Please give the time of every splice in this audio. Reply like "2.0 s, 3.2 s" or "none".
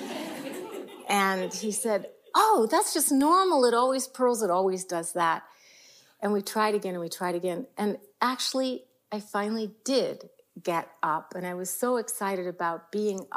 none